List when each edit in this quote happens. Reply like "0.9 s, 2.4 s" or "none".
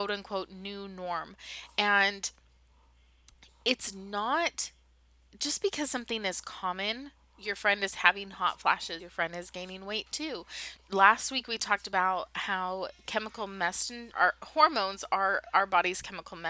9.0 s, 10.8 s, 14.1 s